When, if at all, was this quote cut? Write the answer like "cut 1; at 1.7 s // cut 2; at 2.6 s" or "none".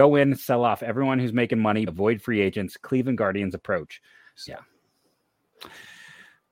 cut 1; at 1.9 s // cut 2; at 4.4 s